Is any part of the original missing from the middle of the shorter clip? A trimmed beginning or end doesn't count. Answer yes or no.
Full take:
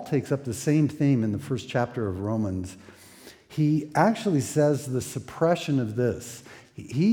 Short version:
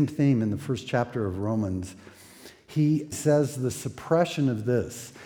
yes